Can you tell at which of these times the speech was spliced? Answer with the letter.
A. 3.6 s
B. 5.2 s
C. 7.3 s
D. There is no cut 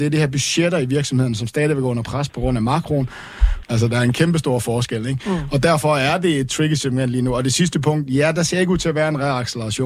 A